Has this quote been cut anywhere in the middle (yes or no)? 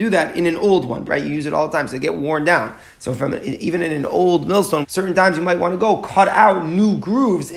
yes